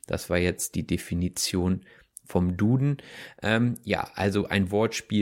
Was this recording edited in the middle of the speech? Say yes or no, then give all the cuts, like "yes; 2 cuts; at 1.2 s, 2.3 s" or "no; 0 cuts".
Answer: no; 0 cuts